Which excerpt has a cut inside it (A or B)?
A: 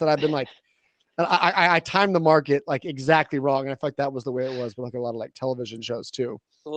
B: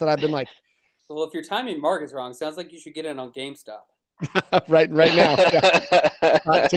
B